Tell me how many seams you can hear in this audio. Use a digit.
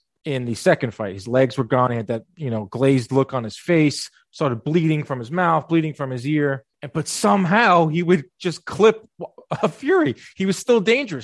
1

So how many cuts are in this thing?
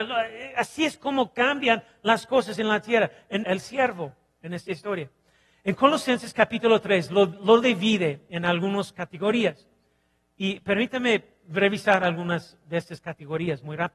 1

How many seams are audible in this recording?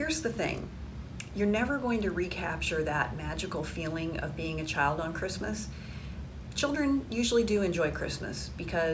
0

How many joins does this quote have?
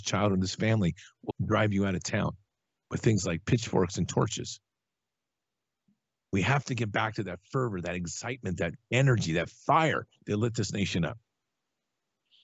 1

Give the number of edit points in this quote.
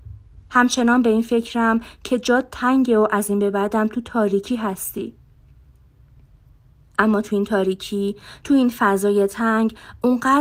0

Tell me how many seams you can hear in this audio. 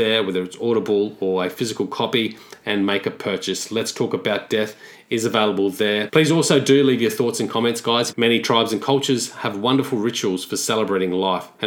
2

